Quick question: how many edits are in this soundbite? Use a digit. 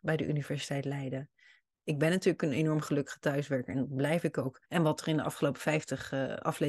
2